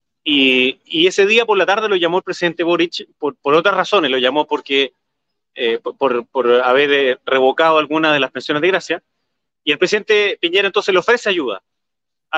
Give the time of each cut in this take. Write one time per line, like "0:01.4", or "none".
none